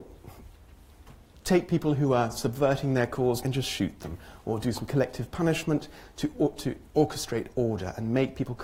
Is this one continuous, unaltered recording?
no; 2 cuts; at 3.4 s, 6.9 s

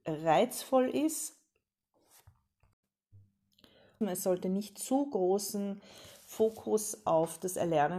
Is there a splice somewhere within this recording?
yes; 1 cut; at 4.0 s

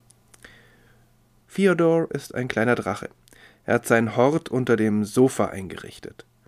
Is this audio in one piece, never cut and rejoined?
no; 1 cut; at 1.4 s

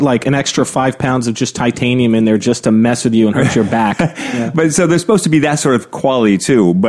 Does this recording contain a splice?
no; 0 cuts

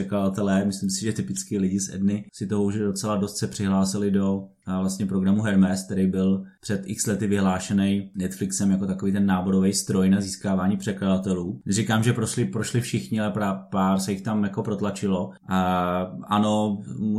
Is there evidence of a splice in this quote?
no; 0 cuts

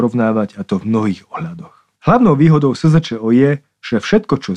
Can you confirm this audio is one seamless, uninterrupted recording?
no; 1 cut; at 1.9 s

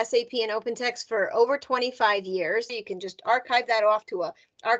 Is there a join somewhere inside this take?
yes; 1 cut; at 2.7 s

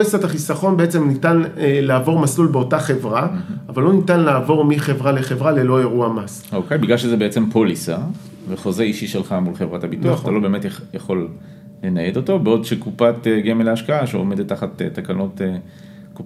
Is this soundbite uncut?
yes; 0 cuts

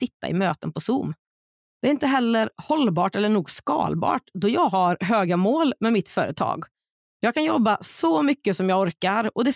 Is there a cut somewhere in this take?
yes; 1 cut; at 7.0 s

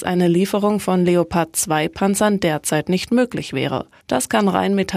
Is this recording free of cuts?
no; 1 cut; at 4.0 s

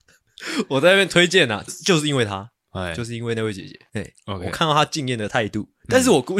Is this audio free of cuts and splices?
no; 1 cut; at 1.7 s

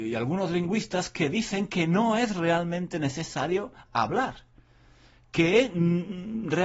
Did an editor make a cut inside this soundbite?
no; 0 cuts

